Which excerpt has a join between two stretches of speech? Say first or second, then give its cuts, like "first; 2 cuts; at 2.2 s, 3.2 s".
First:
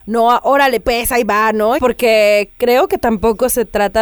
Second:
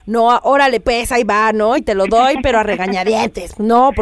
first; 1 cut; at 1.8 s